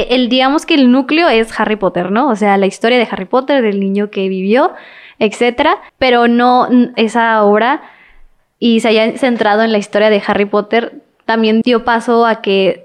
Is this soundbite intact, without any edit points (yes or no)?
no